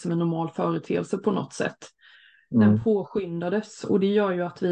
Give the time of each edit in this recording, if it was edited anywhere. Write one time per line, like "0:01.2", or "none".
none